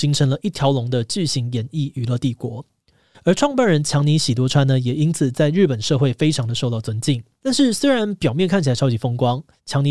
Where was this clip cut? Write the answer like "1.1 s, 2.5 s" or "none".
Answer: 3.1 s, 7.4 s